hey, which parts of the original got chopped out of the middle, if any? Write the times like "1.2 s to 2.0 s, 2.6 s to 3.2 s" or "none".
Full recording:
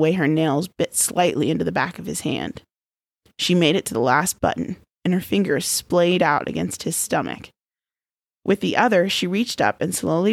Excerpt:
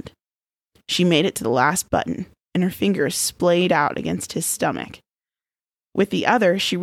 none